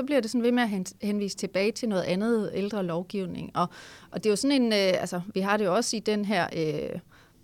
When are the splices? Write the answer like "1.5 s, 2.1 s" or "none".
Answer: none